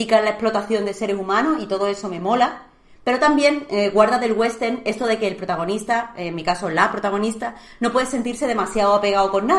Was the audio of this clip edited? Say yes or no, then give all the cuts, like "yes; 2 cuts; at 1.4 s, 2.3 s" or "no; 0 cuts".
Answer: no; 0 cuts